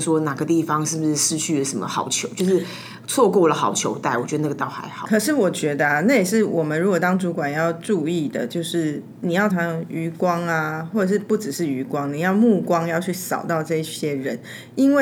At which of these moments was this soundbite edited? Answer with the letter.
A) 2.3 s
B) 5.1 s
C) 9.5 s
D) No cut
C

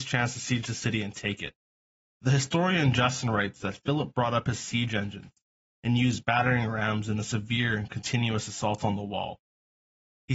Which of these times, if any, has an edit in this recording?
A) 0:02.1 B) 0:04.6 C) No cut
A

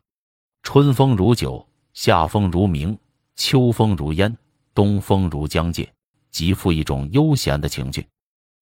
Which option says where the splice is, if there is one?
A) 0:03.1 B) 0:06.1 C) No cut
B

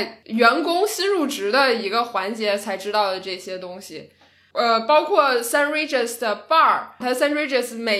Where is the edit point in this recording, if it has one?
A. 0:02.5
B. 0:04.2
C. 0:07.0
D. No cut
C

